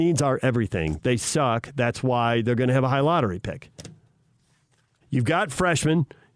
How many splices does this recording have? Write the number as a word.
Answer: one